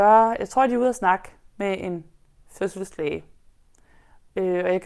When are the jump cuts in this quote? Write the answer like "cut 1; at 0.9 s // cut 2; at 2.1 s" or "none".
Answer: none